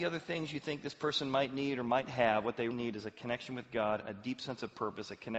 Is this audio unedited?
no; 1 cut; at 2.7 s

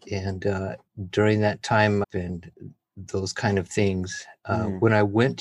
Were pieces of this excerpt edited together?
yes; 1 cut; at 2.0 s

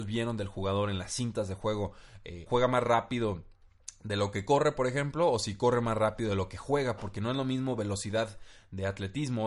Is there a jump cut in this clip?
yes; 1 cut; at 2.5 s

